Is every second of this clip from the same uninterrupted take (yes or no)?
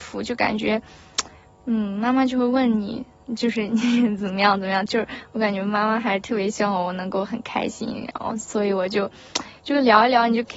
yes